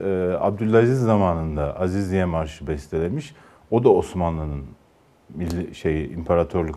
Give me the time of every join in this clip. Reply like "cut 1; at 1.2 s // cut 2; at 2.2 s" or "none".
none